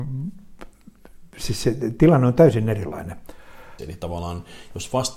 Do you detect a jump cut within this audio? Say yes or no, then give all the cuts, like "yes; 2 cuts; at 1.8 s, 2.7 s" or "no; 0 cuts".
yes; 1 cut; at 3.8 s